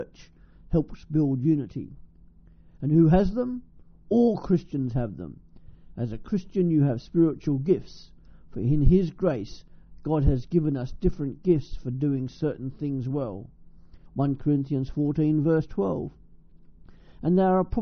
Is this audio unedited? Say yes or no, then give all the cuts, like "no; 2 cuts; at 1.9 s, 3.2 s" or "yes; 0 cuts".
no; 1 cut; at 14.1 s